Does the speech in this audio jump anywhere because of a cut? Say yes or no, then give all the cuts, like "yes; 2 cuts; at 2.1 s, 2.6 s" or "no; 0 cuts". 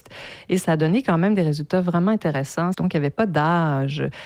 yes; 1 cut; at 2.7 s